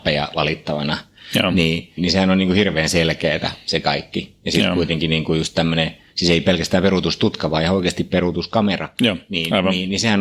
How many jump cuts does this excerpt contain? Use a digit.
1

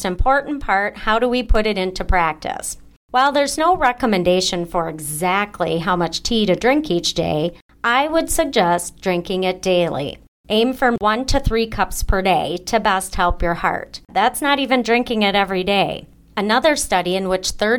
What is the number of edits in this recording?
1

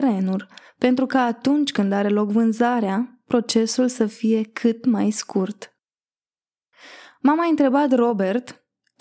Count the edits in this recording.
0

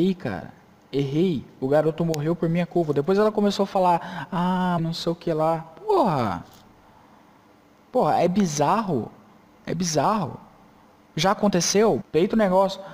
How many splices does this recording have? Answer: 2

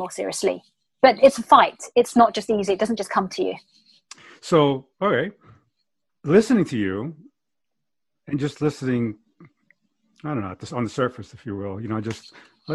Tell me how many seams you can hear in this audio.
0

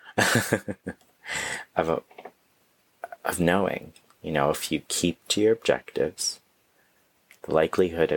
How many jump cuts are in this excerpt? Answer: 1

